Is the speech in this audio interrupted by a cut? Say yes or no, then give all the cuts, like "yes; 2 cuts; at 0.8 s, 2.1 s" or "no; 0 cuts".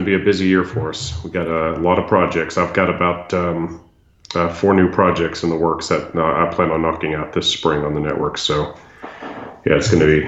no; 0 cuts